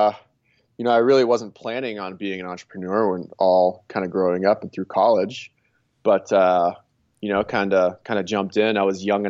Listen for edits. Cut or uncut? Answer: uncut